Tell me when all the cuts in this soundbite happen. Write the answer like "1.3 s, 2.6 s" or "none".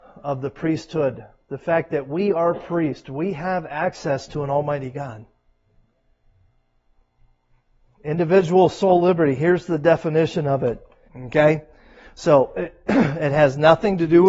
11.1 s